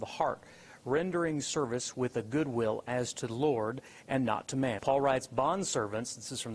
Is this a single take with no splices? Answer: no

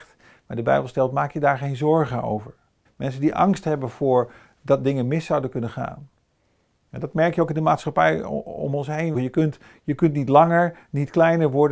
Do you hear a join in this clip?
yes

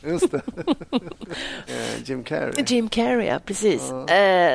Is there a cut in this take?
yes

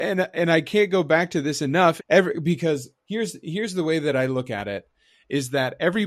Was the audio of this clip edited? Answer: yes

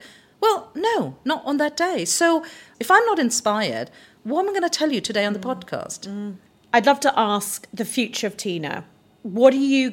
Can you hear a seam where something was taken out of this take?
no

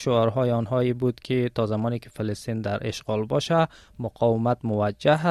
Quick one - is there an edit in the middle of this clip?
no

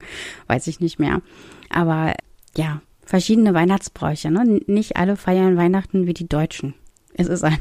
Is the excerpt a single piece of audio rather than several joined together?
yes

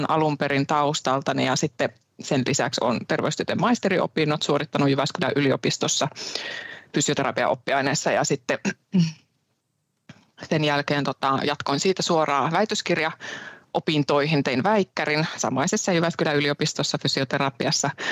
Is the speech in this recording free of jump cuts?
yes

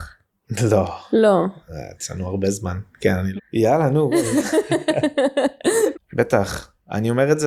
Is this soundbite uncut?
no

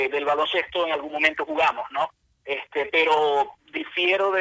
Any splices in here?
no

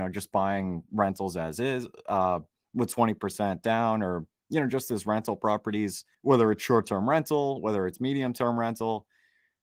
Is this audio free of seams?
yes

